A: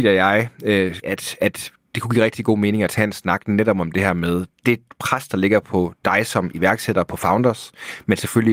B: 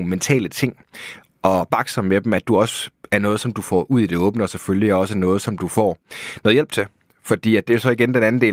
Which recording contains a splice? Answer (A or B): A